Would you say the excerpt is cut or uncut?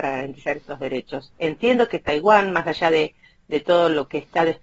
uncut